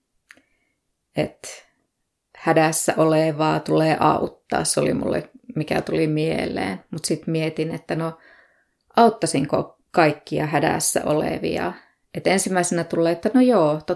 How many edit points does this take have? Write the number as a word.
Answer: zero